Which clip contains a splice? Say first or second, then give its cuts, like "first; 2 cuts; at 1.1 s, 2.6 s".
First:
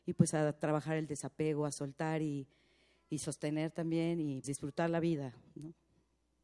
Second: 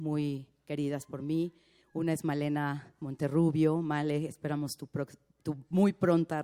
first; 1 cut; at 4.4 s